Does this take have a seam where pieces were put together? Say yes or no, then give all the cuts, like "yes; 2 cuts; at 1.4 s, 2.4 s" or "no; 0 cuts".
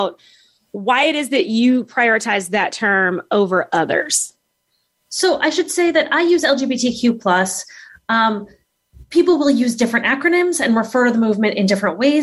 no; 0 cuts